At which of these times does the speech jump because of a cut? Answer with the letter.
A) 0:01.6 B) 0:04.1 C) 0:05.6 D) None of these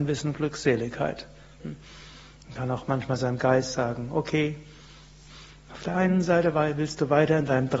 A